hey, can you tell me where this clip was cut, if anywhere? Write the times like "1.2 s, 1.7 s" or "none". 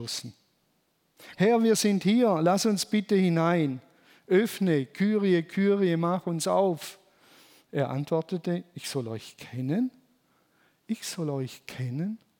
1.3 s